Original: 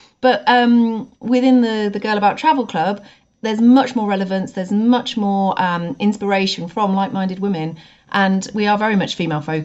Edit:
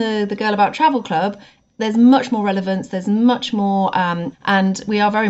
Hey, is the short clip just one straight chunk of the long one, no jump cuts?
no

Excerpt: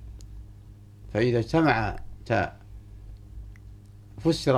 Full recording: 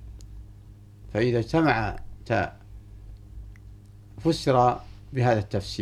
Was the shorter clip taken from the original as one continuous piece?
yes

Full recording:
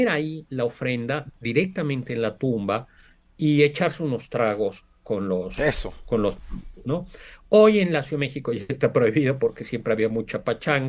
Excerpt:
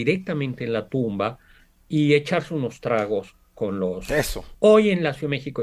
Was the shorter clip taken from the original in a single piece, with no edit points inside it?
no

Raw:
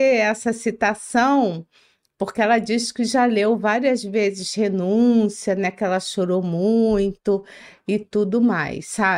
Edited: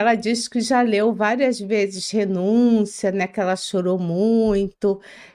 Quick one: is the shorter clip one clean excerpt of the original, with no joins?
yes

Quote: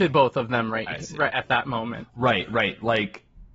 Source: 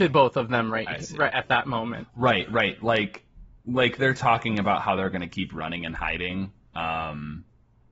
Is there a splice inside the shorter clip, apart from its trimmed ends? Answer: no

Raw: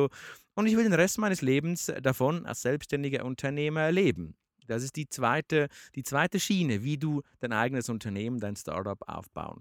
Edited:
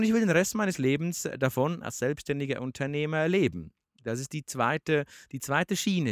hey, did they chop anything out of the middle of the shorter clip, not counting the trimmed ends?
no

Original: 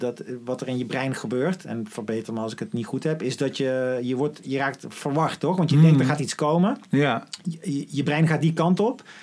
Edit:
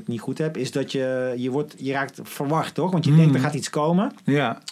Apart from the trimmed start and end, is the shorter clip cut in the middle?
no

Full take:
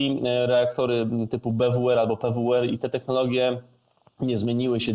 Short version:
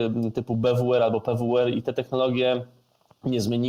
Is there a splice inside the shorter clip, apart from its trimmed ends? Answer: no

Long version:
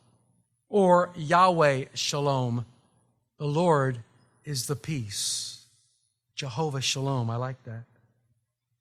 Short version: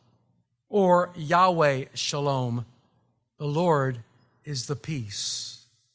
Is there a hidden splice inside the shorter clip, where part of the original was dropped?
no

